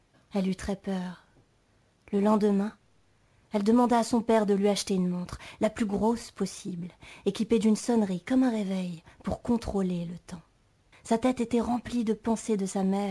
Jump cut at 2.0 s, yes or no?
no